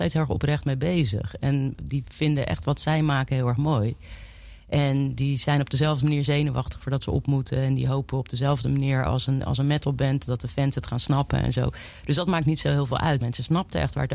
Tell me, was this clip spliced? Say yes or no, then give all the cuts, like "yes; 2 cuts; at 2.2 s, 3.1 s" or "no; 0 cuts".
yes; 1 cut; at 13.2 s